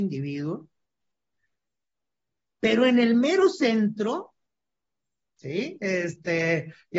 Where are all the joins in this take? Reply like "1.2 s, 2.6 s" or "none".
2.4 s, 5.8 s